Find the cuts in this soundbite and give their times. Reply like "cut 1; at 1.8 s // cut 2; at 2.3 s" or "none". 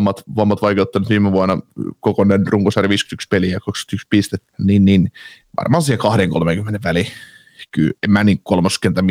cut 1; at 4.5 s // cut 2; at 8.0 s

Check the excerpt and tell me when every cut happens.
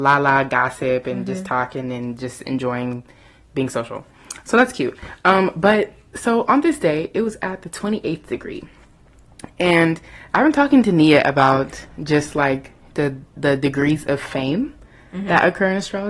none

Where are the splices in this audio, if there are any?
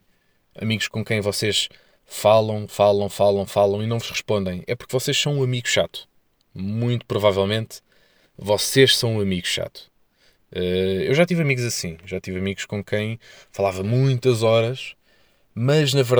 none

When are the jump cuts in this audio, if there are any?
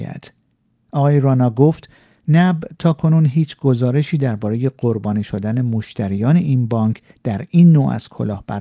none

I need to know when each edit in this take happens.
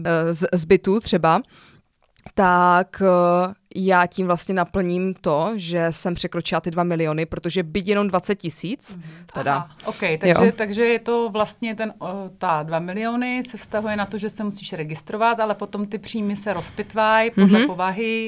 cut 1; at 9.3 s

